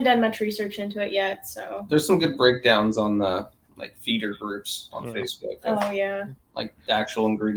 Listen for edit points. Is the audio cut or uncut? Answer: uncut